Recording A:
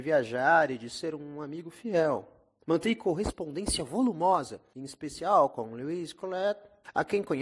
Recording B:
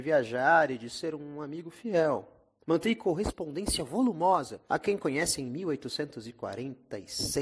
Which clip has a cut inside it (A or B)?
B